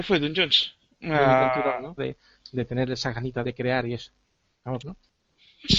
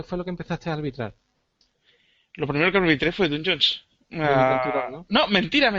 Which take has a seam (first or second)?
first